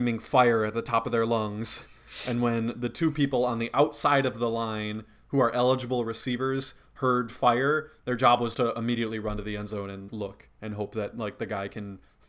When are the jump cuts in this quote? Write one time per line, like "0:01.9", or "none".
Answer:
0:08.5
0:10.1